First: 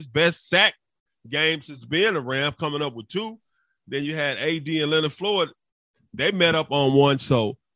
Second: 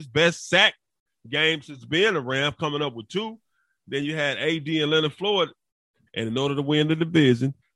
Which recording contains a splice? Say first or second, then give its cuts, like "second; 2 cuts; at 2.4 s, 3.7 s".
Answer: second; 1 cut; at 6.1 s